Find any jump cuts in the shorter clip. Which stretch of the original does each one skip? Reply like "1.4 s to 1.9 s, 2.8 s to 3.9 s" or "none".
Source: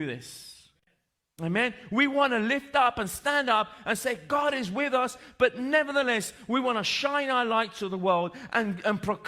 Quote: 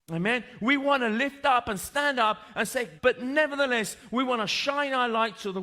4.3 s to 5.3 s